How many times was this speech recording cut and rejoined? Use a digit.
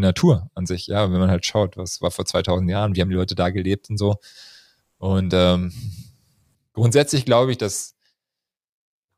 0